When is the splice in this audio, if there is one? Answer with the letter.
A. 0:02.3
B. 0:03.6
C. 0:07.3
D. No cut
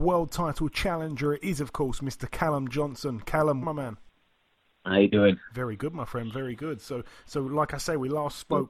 B